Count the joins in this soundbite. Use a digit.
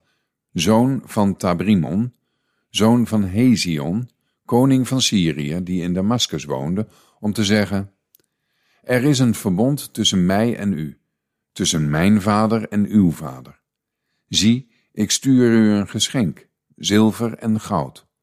0